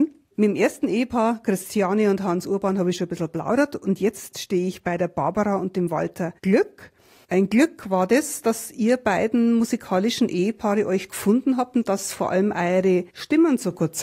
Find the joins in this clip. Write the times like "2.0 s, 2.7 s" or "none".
none